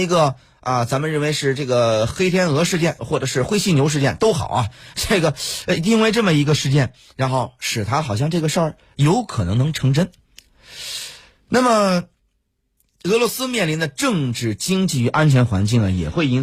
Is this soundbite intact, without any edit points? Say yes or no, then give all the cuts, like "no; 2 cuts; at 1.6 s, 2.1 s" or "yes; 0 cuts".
no; 1 cut; at 3.0 s